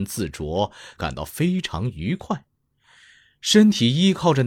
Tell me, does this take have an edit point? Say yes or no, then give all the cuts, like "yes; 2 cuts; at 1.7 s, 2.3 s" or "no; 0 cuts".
yes; 1 cut; at 1.0 s